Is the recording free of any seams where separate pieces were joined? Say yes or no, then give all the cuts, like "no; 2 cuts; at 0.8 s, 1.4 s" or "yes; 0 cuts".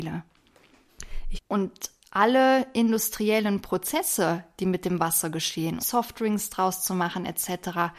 no; 2 cuts; at 1.4 s, 5.8 s